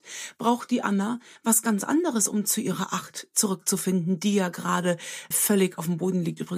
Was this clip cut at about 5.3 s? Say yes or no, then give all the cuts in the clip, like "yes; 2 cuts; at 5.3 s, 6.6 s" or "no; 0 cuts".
yes; 1 cut; at 5.3 s